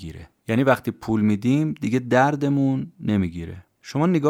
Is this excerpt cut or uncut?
uncut